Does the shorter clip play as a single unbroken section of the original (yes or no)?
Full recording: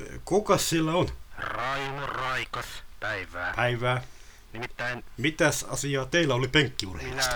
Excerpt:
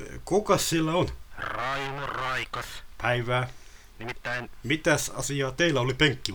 no